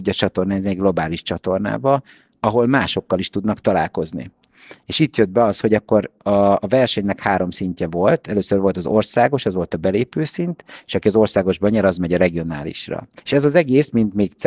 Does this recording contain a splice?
yes; 1 cut; at 13.2 s

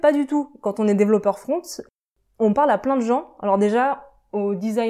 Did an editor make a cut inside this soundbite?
no; 0 cuts

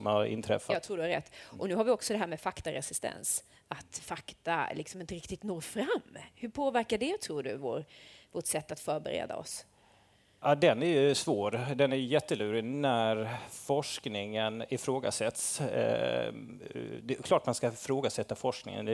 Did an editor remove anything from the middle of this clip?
no; 0 cuts

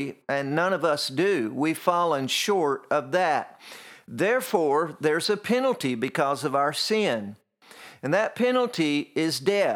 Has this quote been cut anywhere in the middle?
no; 0 cuts

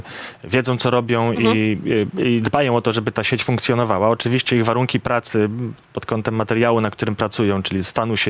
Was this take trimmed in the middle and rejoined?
no; 0 cuts

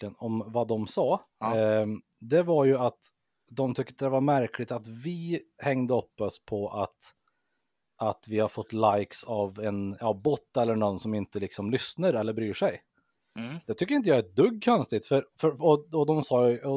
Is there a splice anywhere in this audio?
yes; 1 cut; at 1.3 s

